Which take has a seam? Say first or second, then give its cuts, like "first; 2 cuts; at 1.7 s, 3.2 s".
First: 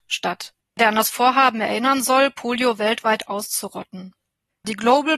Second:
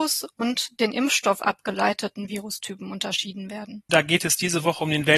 second; 1 cut; at 3.9 s